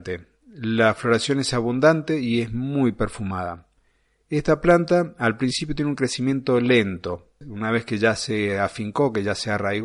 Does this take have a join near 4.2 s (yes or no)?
no